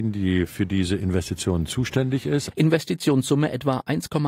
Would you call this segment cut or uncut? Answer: cut